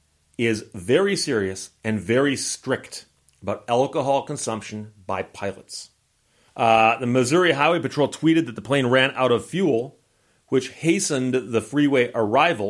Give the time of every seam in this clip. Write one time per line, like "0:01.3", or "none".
0:06.5